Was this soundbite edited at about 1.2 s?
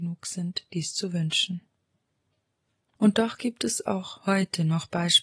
no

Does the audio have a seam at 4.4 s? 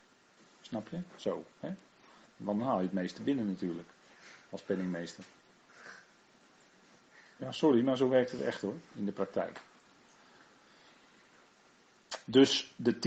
no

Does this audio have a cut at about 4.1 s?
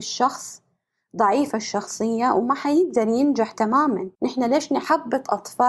yes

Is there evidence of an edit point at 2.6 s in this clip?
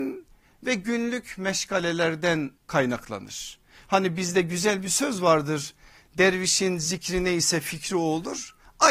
yes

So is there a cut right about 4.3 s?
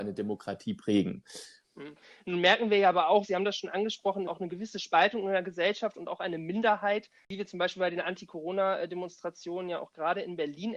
yes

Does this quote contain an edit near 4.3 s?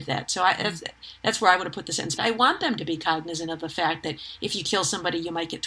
no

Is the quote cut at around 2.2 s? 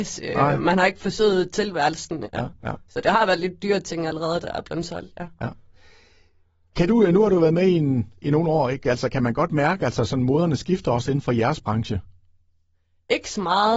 yes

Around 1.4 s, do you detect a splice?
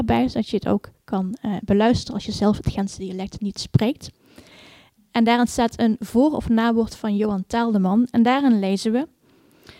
no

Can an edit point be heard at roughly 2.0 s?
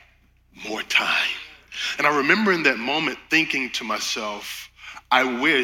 yes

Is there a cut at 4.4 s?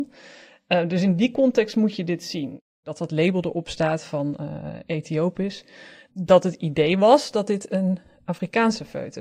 no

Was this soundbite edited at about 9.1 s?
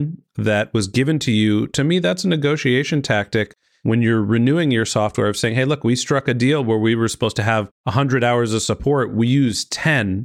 no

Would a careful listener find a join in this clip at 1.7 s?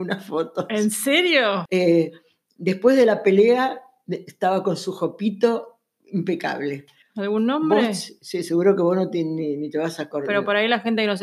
yes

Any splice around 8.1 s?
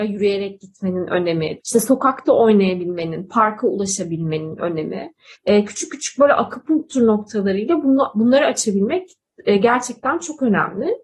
no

